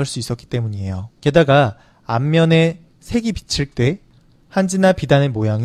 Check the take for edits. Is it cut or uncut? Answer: cut